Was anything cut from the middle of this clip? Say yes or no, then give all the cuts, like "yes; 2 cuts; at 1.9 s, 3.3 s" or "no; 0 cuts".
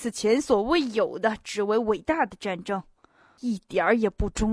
yes; 1 cut; at 3.4 s